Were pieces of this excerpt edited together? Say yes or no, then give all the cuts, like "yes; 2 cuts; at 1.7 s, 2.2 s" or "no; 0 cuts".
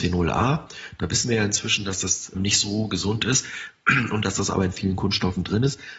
yes; 1 cut; at 2.3 s